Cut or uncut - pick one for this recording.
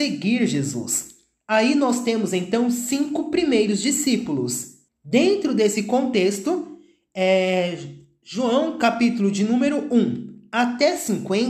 cut